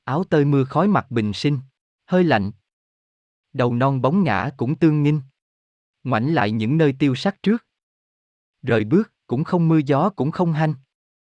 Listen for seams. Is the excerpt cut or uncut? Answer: cut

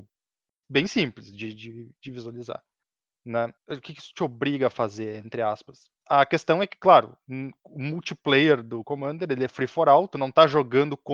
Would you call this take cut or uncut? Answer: cut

